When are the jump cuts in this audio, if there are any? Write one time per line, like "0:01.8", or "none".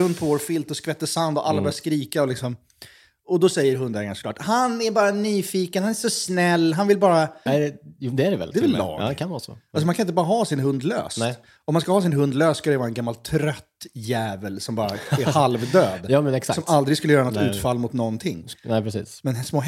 0:07.5